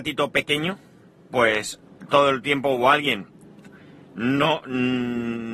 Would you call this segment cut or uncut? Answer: uncut